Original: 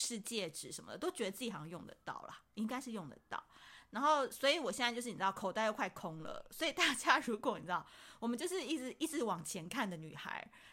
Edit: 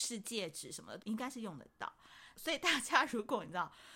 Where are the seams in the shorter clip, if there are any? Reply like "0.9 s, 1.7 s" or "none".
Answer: 1.0 s, 2.3 s